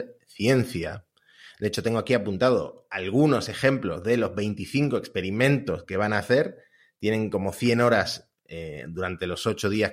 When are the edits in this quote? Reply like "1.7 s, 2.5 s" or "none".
none